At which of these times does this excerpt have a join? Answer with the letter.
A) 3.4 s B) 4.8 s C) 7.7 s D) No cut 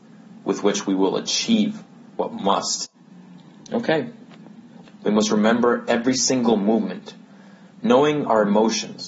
B